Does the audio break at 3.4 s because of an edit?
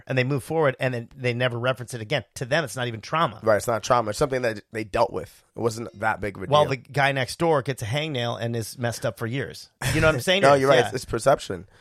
no; 2 cuts; at 6.7 s, 10.4 s

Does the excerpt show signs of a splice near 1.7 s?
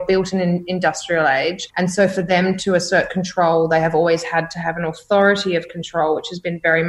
yes; 1 cut; at 1.7 s

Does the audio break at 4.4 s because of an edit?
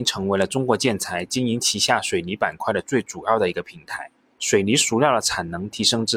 yes; 1 cut; at 4.4 s

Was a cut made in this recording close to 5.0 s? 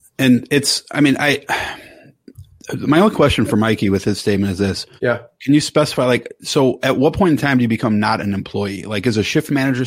yes; 1 cut; at 5.0 s

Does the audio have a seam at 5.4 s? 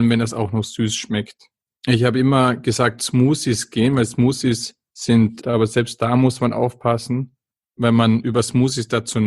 yes; 1 cut; at 5.4 s

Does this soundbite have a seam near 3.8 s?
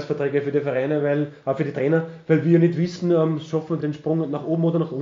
yes; 1 cut; at 3.8 s

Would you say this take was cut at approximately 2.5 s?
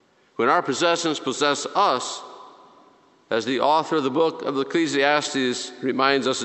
no; 0 cuts

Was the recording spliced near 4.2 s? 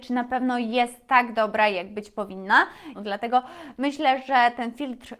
no; 1 cut; at 2.9 s

